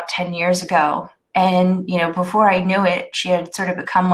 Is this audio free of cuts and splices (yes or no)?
no